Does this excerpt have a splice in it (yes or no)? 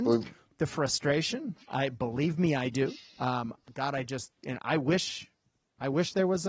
no